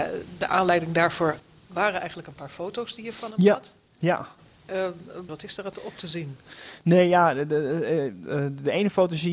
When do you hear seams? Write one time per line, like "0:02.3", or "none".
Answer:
0:05.3